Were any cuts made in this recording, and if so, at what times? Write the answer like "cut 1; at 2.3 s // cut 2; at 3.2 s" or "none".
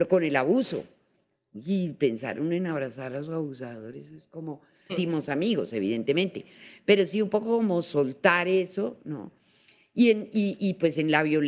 cut 1; at 4.9 s